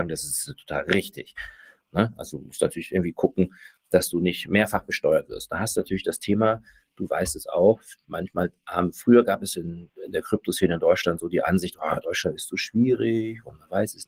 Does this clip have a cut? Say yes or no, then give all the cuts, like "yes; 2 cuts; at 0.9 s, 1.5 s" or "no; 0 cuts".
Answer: no; 0 cuts